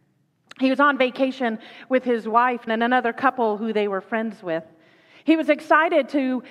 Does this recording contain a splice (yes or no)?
yes